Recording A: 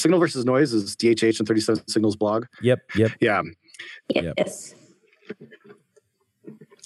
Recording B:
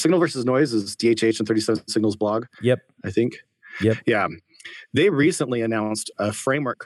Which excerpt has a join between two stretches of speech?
A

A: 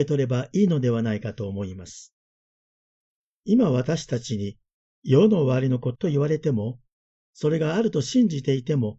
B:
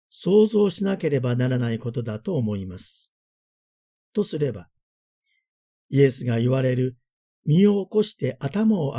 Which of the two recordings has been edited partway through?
A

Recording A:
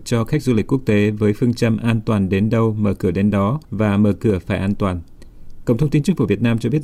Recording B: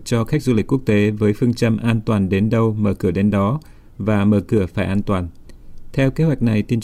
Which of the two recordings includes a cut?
A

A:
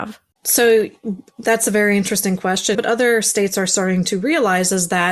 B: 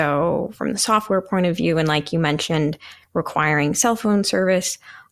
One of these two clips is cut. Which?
A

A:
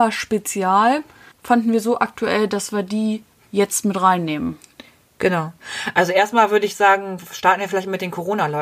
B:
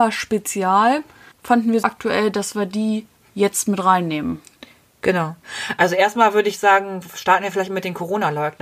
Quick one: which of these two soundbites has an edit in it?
B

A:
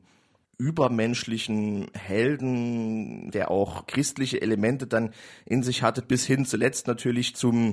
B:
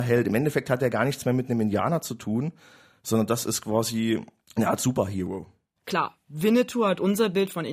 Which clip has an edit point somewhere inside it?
B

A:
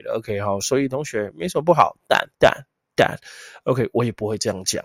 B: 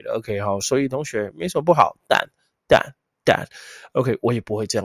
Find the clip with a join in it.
A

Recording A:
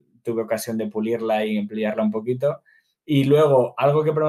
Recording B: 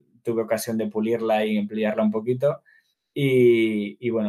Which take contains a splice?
A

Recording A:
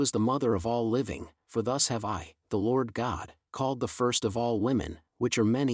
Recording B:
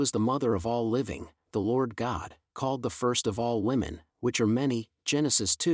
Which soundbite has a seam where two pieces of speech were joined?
B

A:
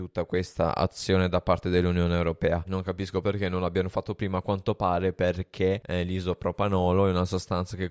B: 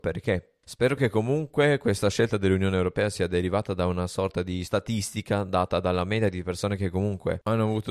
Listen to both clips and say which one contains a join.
A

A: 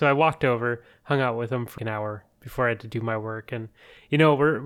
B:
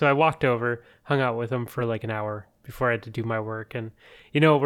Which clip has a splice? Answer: A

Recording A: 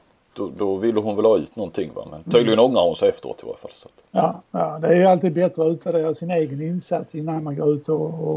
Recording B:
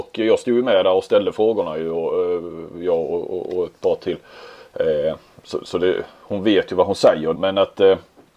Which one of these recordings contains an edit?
B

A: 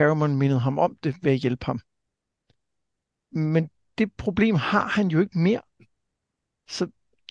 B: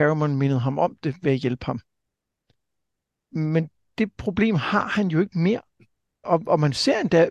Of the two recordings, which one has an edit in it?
B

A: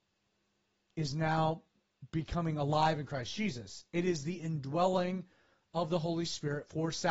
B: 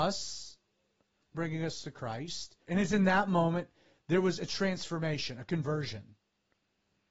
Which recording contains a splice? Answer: B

